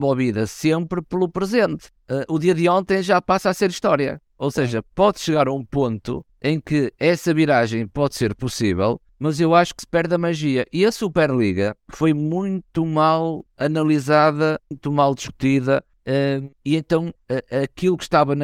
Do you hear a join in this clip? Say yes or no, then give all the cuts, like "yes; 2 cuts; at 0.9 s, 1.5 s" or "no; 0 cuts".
yes; 1 cut; at 2.0 s